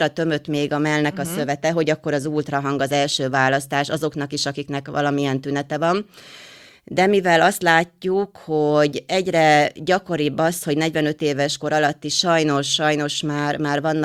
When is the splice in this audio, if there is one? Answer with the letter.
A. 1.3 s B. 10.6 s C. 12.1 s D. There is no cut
D